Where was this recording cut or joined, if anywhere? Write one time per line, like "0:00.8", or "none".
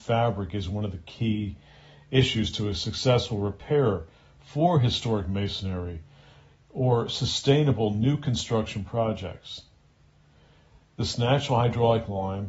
none